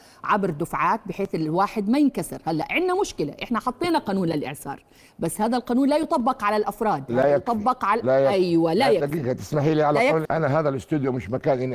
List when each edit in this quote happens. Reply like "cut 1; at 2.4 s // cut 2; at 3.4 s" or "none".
cut 1; at 10.3 s